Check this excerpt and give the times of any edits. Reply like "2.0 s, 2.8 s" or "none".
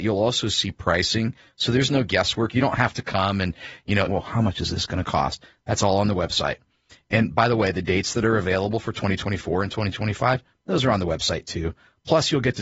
4.1 s